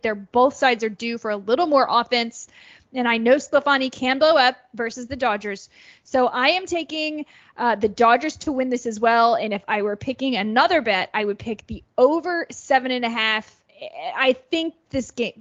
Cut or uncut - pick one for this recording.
uncut